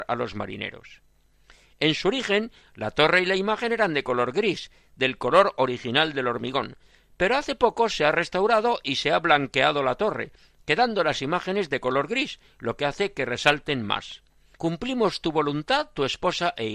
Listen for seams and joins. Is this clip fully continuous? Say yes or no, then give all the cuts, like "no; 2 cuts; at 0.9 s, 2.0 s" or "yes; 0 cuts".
no; 1 cut; at 14.5 s